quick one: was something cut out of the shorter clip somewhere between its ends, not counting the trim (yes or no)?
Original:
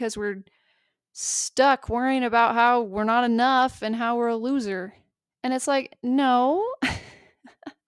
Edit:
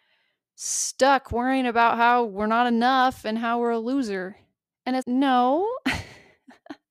yes